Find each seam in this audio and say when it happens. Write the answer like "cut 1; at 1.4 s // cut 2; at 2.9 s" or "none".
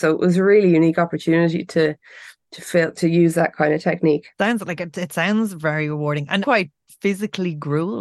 cut 1; at 4.3 s // cut 2; at 6.4 s